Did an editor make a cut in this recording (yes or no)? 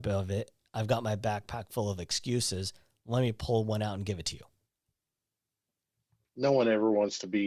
no